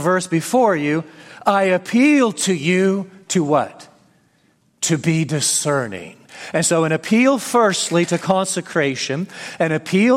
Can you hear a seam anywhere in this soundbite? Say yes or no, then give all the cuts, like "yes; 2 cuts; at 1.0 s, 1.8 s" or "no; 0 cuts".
no; 0 cuts